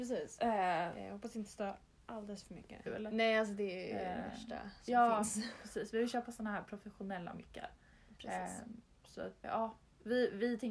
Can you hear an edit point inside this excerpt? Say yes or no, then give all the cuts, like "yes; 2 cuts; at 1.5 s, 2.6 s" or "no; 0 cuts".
yes; 2 cuts; at 2.9 s, 9.4 s